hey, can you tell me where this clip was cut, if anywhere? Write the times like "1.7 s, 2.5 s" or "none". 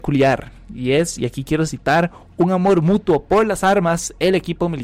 none